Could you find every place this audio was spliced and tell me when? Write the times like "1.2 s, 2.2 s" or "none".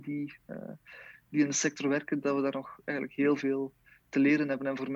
none